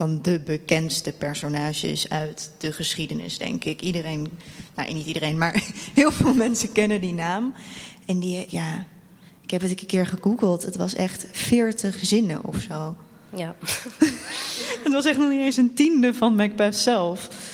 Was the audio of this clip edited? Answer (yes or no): yes